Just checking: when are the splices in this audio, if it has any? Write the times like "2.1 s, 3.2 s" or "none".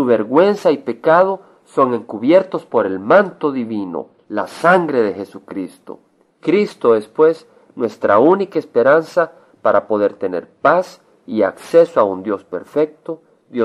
6.3 s